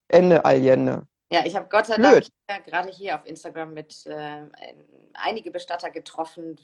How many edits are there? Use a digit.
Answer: 0